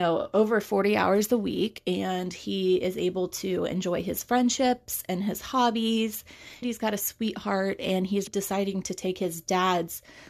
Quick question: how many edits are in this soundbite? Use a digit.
2